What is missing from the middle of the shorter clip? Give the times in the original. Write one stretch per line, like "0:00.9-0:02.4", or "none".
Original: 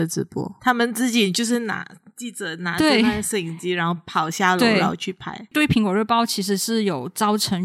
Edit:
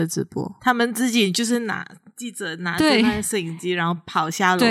none